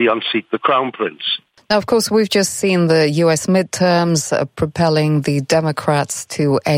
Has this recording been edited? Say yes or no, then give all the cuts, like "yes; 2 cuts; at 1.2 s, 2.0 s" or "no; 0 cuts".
no; 0 cuts